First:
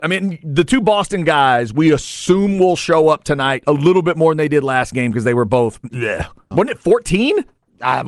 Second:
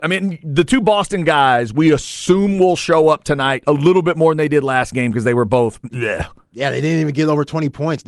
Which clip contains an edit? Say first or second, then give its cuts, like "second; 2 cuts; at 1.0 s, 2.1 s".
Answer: first; 1 cut; at 6.5 s